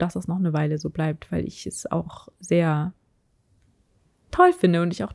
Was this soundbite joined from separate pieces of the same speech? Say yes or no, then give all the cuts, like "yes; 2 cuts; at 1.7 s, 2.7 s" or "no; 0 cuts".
no; 0 cuts